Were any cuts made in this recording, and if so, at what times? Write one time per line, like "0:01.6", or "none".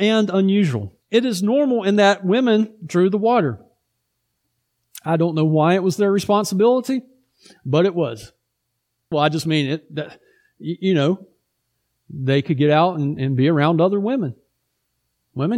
0:01.0
0:09.1
0:13.2